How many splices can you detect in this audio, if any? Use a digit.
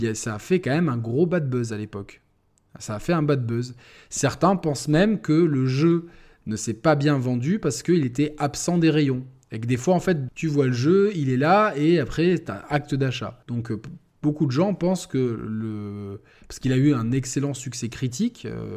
2